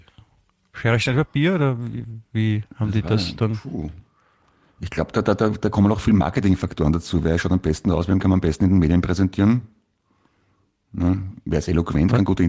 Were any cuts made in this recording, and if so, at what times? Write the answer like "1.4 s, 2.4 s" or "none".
none